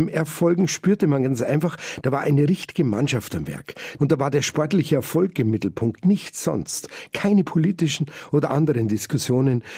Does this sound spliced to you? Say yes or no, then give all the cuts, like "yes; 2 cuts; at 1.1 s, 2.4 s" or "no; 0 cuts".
yes; 1 cut; at 4.0 s